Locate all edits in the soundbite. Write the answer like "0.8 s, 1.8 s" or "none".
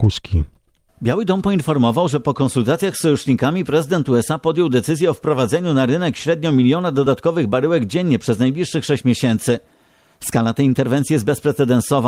none